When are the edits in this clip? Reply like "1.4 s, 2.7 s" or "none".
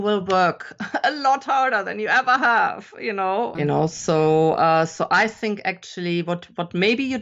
3.6 s